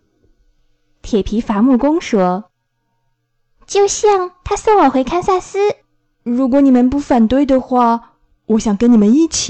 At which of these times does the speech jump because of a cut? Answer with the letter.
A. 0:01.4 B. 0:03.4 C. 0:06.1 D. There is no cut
C